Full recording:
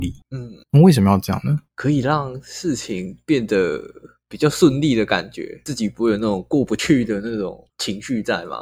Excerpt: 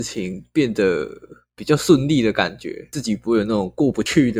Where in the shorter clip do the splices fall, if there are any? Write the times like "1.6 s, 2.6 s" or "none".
none

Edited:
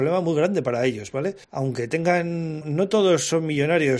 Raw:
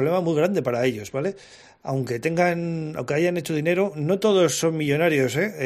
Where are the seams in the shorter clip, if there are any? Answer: 1.4 s, 2.6 s

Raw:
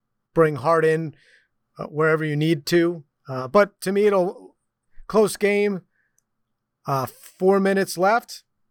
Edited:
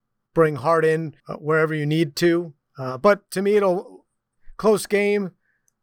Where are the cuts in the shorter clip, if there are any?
1.2 s

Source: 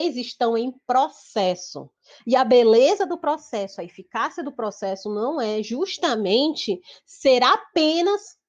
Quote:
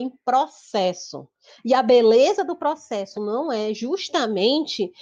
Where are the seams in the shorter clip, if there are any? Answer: 3.1 s

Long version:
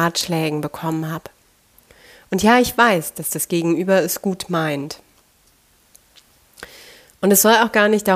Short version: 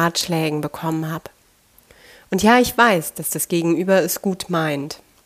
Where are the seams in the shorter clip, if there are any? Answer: none

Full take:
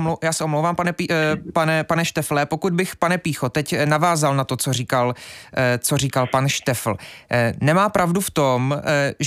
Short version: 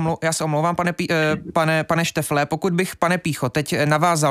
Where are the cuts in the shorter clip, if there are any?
none

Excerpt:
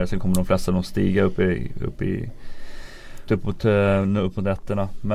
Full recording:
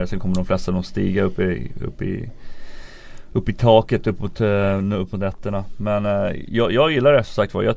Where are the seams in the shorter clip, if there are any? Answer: 3.3 s

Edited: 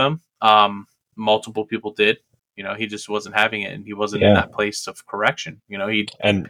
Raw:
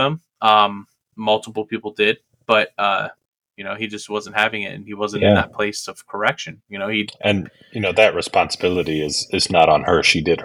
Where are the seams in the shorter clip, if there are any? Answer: 2.4 s

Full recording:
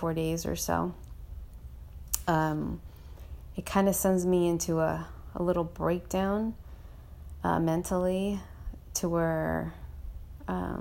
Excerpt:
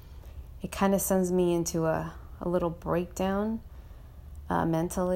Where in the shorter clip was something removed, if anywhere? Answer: none

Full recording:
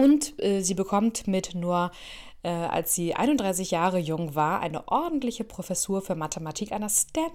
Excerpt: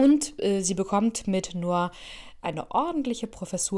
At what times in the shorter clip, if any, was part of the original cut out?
2.4 s

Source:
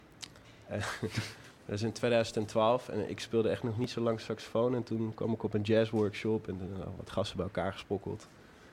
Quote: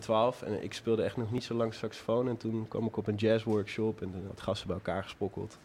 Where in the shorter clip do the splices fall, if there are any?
4.3 s

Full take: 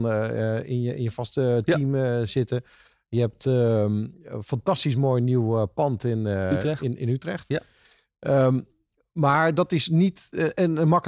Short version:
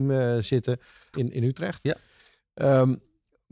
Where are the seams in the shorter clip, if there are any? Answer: 1.1 s

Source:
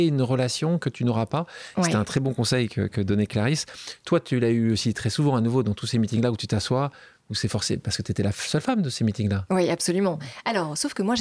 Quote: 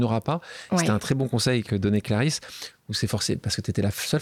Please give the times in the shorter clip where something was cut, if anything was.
1.6 s, 2.7 s

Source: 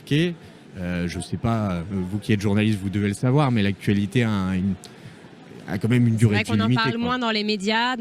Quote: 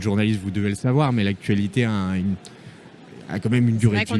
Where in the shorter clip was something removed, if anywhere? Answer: none

